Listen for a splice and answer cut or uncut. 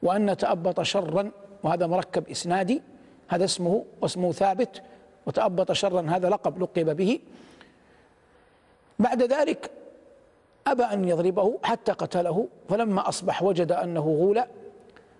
uncut